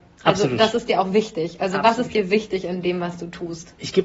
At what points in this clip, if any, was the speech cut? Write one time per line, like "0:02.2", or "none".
none